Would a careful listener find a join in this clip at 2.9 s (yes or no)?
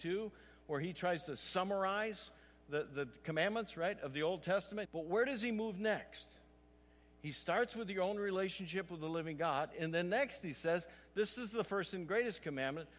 no